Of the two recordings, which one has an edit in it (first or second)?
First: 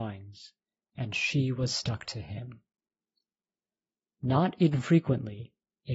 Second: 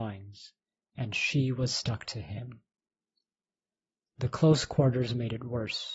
second